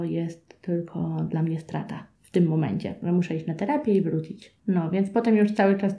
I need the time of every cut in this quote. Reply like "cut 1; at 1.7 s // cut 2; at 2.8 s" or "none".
none